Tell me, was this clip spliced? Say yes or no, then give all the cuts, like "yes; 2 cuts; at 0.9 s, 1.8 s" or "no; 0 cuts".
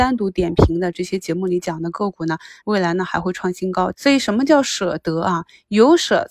yes; 2 cuts; at 2.6 s, 3.9 s